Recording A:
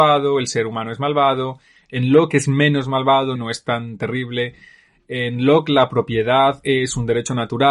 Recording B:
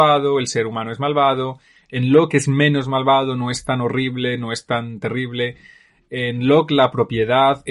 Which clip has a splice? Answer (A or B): A